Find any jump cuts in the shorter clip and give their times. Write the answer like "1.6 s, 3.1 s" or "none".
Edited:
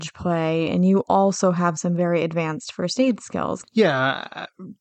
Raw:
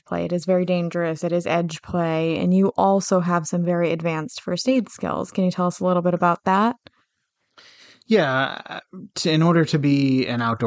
3.6 s